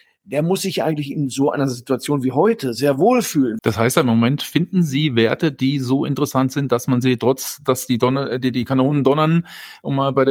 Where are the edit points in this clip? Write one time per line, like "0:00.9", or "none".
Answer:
0:03.6